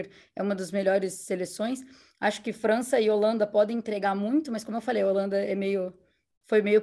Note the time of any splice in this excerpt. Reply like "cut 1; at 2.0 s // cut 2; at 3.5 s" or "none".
none